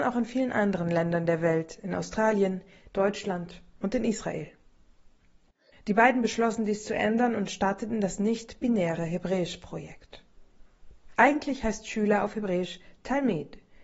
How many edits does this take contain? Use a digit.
2